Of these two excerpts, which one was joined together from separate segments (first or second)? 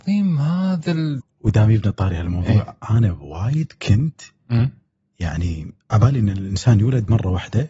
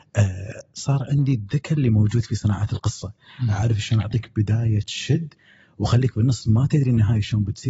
first